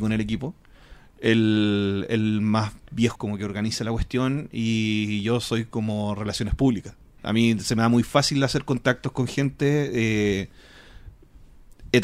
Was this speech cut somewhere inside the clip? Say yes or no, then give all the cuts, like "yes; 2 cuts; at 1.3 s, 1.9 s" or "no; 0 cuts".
yes; 2 cuts; at 3.1 s, 7.2 s